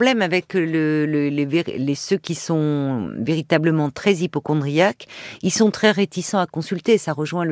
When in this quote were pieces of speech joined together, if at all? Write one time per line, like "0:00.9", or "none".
none